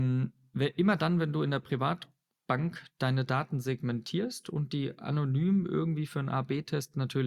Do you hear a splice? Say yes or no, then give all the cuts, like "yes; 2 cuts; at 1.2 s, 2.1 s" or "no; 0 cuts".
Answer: no; 0 cuts